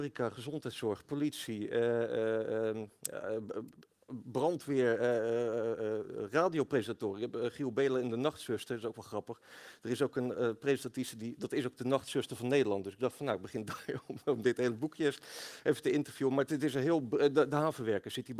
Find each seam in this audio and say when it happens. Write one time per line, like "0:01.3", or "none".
none